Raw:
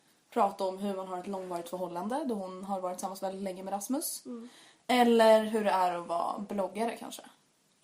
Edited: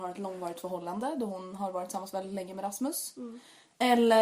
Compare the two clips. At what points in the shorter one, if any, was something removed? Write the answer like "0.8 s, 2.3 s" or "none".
none